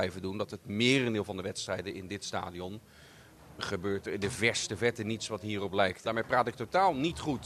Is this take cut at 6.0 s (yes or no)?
yes